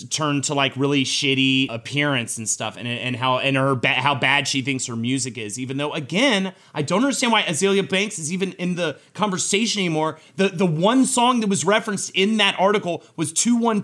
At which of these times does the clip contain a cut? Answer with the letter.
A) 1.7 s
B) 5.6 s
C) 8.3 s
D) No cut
A